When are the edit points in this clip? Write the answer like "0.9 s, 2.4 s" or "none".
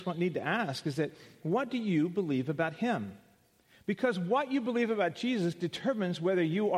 none